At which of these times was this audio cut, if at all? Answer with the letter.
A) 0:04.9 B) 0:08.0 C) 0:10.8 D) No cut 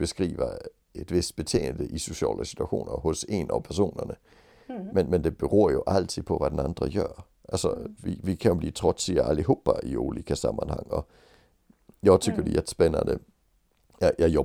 B